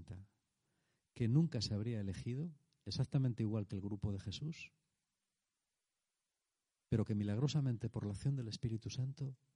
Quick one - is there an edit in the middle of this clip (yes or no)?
no